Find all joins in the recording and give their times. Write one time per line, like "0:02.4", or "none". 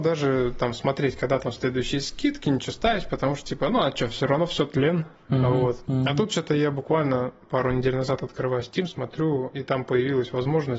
none